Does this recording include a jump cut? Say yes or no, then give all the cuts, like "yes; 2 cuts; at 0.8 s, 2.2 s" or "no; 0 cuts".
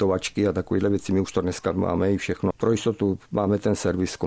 yes; 1 cut; at 2.5 s